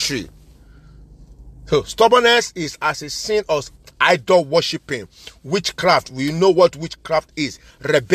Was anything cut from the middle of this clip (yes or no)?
yes